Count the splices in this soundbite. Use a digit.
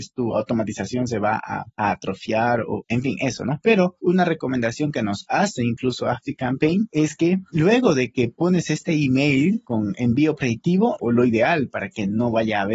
2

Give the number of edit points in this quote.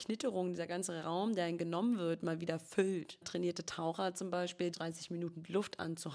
2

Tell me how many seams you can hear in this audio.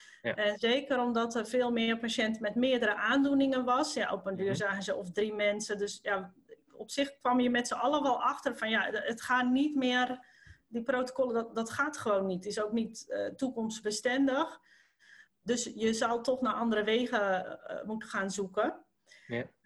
0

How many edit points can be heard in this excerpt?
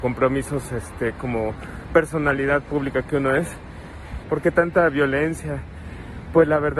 2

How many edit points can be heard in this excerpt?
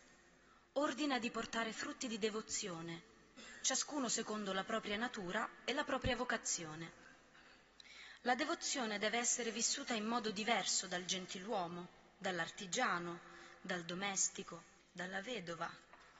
1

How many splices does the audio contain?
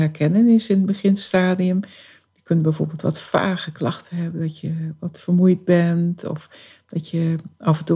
0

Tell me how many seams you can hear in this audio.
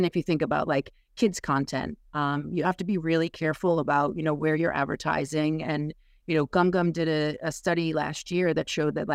0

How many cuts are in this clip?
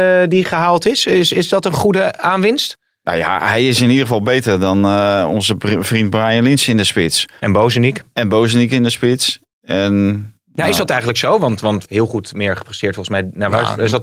1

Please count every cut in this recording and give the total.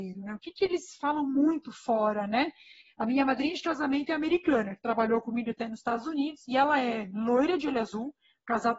0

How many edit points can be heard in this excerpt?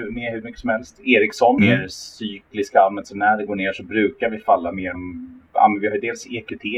2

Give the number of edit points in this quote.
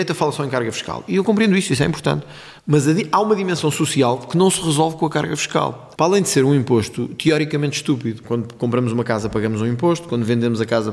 3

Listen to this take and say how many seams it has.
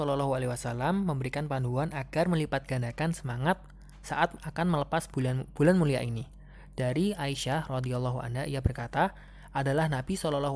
0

